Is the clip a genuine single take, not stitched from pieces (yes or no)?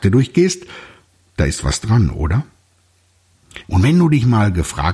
no